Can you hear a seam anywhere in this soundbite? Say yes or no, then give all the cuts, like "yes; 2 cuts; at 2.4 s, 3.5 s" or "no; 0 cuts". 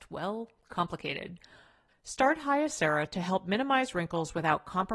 yes; 1 cut; at 1.9 s